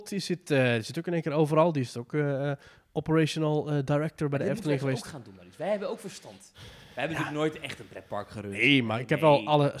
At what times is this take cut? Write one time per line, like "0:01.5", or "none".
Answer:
none